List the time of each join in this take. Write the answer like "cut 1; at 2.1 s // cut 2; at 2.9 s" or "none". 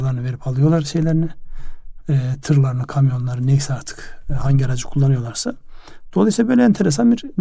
none